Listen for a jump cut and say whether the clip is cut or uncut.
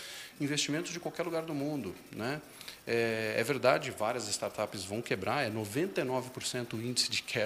uncut